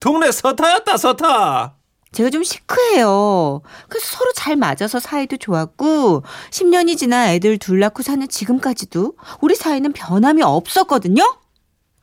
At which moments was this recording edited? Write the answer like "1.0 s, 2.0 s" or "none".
2.1 s, 3.8 s